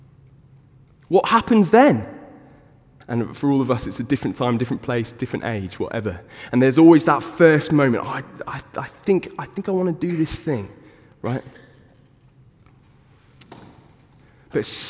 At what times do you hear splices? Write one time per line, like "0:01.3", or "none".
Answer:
0:03.0